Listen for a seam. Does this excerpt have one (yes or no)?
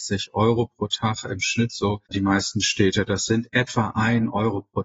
yes